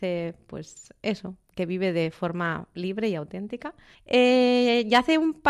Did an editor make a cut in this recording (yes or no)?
yes